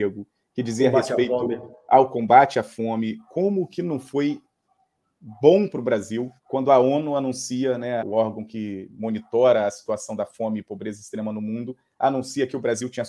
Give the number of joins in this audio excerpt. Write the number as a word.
two